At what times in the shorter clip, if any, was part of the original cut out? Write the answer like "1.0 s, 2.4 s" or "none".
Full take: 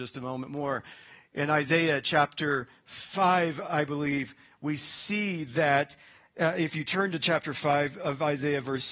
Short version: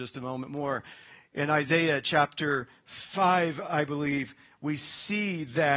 none